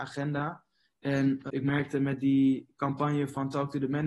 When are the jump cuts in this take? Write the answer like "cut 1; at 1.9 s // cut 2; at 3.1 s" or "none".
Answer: cut 1; at 1.5 s